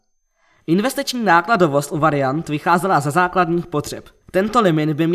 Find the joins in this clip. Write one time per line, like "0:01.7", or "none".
0:04.2